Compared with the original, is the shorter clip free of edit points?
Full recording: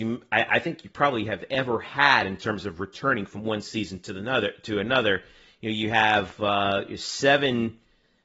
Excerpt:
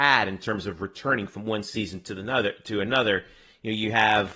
yes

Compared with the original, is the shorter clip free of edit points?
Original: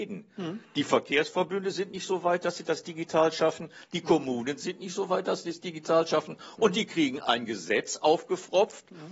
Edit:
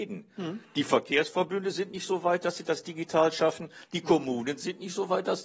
yes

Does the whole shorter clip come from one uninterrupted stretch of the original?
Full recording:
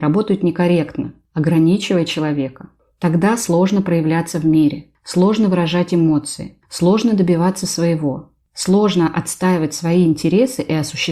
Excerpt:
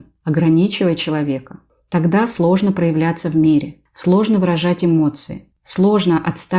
no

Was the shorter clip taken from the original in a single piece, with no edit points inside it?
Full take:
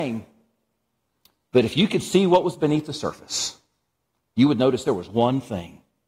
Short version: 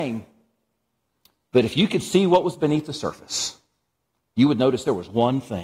yes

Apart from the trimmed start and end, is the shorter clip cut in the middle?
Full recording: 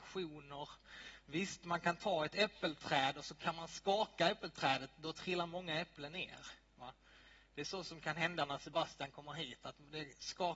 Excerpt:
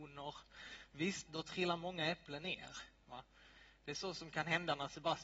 yes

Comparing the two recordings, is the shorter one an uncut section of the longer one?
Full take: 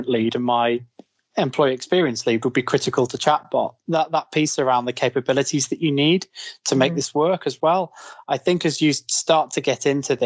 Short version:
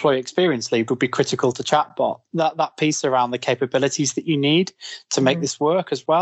yes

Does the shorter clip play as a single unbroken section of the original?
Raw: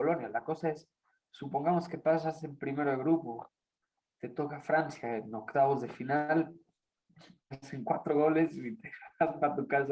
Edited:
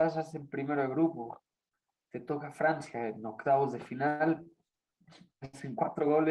yes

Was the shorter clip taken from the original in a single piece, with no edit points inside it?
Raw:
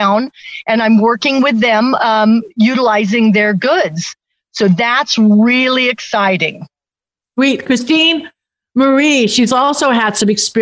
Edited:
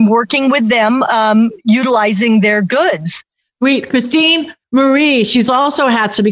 no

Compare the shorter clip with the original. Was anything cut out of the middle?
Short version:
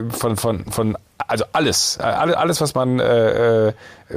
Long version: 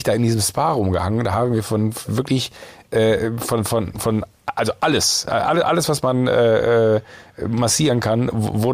no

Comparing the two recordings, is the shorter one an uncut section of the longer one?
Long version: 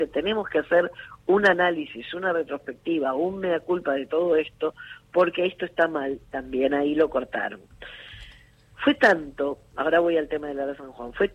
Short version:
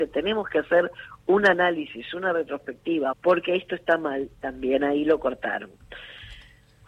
no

